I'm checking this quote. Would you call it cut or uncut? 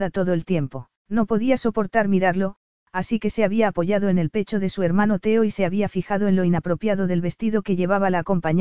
cut